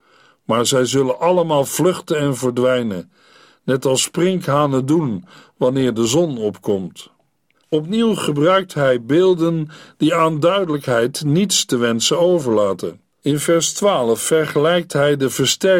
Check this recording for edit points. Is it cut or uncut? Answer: cut